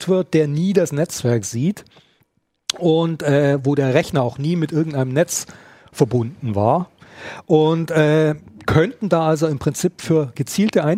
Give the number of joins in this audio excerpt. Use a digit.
0